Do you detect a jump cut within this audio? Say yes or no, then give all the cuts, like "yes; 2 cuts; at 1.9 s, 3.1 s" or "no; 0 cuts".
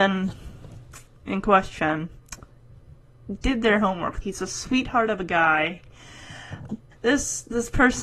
yes; 2 cuts; at 4.2 s, 6.9 s